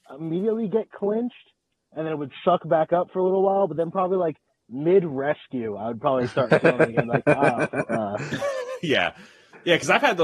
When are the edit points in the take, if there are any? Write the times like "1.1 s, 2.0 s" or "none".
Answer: none